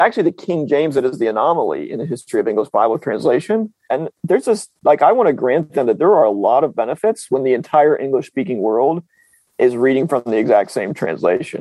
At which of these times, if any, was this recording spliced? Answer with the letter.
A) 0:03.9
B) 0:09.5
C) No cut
A